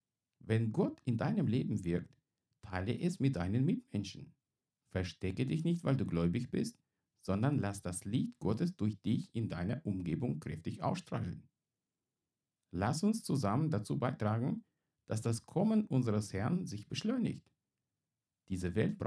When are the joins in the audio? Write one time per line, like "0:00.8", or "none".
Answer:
none